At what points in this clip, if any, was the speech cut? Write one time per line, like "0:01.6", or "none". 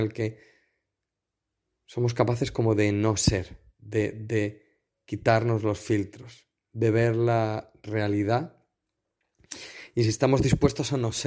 none